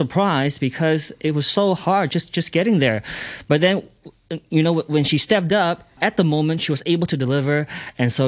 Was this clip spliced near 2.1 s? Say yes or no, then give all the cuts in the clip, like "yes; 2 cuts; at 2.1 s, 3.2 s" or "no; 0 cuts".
no; 1 cut; at 6.0 s